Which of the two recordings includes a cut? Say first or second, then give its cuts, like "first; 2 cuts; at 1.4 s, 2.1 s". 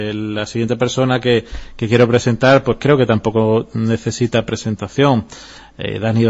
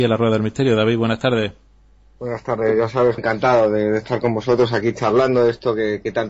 second; 1 cut; at 3.2 s